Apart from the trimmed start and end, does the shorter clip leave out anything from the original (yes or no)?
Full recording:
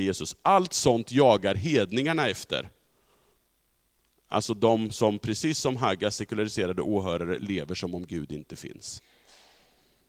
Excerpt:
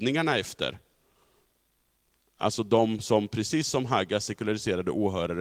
no